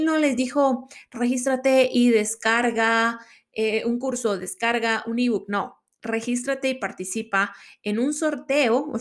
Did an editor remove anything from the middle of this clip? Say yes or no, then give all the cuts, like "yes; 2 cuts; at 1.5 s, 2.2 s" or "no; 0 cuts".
no; 0 cuts